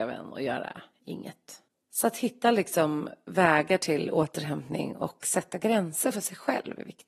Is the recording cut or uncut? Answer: uncut